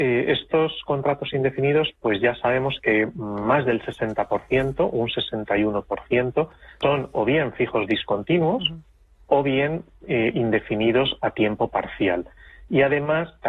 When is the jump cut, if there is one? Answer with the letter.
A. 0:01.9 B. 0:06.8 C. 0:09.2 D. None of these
B